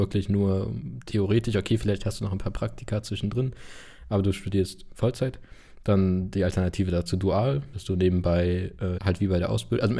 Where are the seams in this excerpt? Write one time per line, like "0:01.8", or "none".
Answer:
0:07.7
0:09.0